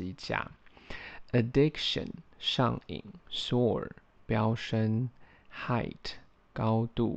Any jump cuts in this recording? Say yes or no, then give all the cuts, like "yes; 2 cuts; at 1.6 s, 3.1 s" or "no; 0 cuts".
yes; 1 cut; at 3.2 s